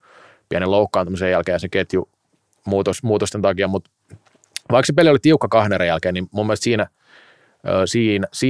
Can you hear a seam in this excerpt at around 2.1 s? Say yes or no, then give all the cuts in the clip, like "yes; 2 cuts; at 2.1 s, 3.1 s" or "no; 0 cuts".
no; 0 cuts